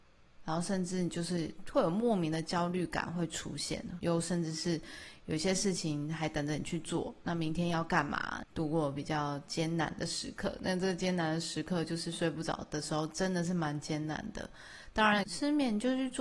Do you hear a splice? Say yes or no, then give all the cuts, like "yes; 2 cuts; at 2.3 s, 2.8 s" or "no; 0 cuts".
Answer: yes; 3 cuts; at 4.0 s, 8.4 s, 15.2 s